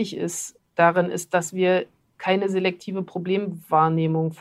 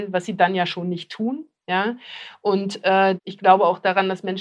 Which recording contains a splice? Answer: second; 1 cut; at 3.2 s

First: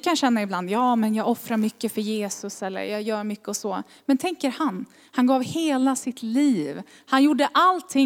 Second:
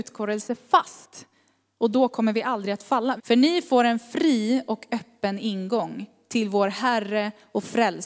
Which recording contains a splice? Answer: second; 1 cut; at 3.2 s

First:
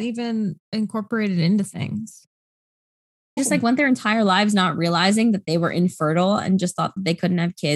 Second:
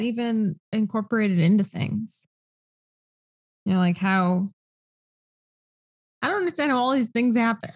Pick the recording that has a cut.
first; 1 cut; at 3.4 s

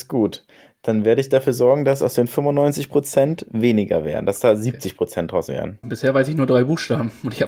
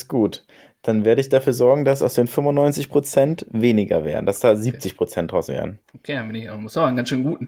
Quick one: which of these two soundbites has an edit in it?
first; 1 cut; at 5.8 s

